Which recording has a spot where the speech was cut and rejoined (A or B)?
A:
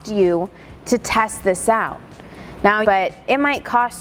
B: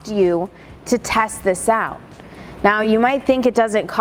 A